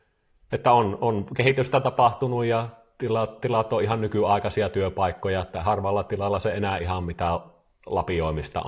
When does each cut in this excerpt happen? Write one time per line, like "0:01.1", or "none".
none